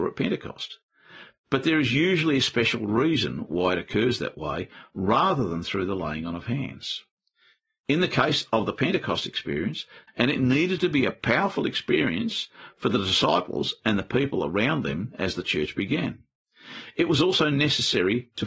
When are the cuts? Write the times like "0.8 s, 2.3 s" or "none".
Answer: 10.1 s